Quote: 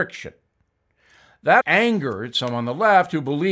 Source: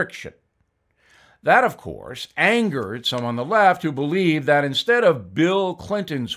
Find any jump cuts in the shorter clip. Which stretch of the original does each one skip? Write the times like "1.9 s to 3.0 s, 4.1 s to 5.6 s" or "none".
1.6 s to 2.3 s